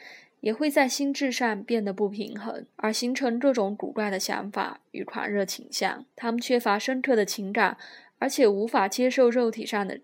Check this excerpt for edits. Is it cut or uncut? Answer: cut